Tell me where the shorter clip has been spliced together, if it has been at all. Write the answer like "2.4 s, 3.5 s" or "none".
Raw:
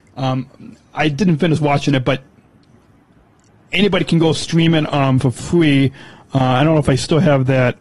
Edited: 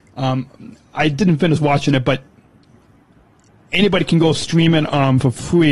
none